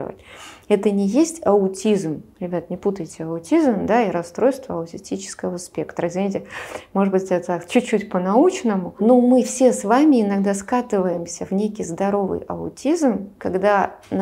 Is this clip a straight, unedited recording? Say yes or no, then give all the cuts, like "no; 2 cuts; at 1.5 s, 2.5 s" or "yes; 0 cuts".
yes; 0 cuts